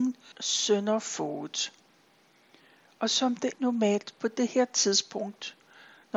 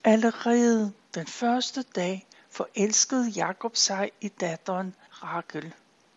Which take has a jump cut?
first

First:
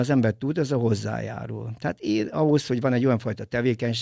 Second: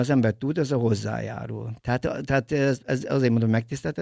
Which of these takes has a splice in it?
second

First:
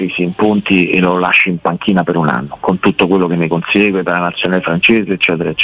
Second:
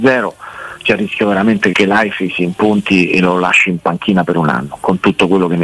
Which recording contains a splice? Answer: second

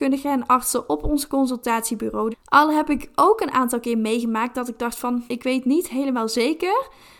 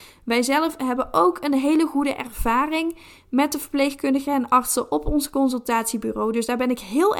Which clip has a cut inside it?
first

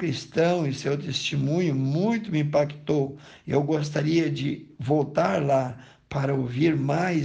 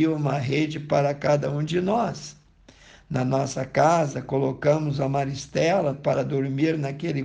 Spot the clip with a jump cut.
second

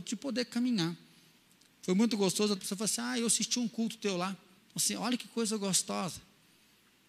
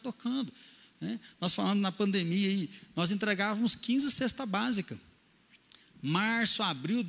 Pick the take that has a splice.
first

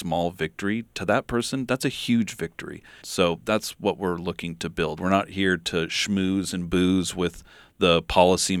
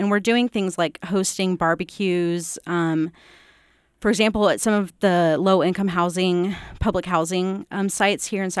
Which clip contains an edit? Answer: first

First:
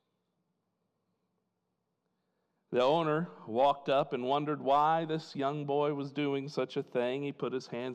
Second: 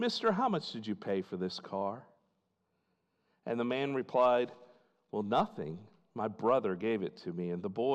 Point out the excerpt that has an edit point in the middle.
first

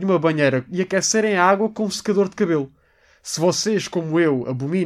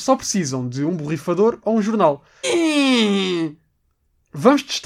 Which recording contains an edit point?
second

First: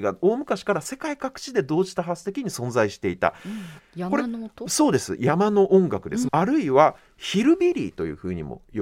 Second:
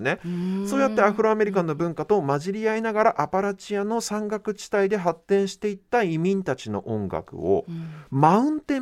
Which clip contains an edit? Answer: first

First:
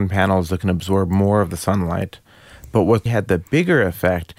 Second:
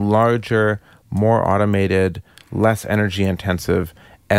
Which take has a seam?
first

